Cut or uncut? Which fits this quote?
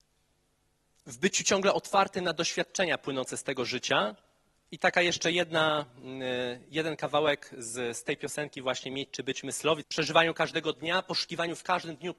cut